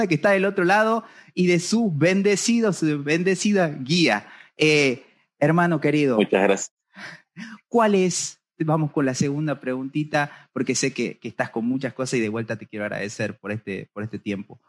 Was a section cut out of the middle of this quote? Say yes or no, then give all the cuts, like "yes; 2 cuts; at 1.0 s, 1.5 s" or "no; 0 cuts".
no; 0 cuts